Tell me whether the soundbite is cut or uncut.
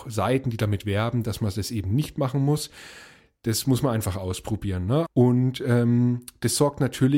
cut